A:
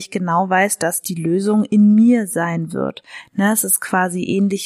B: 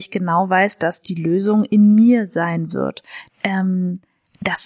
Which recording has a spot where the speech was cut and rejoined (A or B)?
B